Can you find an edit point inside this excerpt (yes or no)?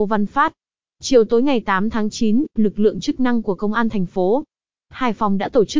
no